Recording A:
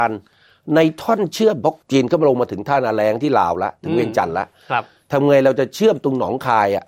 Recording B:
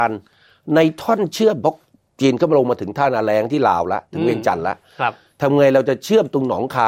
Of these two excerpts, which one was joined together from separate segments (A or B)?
A